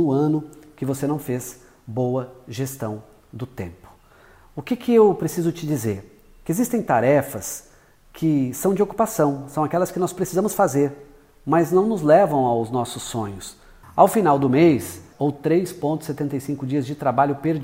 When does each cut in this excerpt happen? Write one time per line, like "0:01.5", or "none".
0:13.8
0:15.1